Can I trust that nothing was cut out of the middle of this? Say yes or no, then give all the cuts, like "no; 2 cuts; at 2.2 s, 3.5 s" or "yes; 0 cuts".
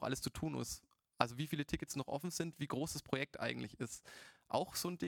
yes; 0 cuts